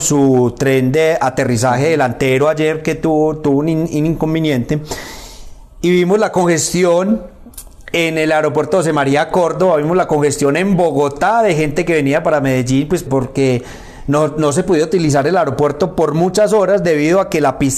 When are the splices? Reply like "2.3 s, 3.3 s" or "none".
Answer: 13.1 s